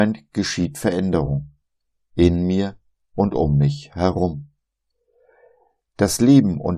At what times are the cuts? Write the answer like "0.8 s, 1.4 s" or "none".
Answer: none